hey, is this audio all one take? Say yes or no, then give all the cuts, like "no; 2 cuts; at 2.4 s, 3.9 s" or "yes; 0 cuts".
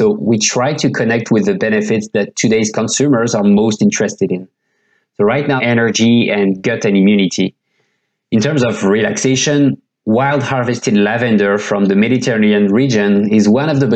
no; 1 cut; at 5.6 s